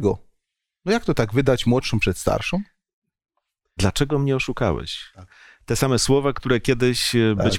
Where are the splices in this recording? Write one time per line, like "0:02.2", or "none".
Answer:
0:03.8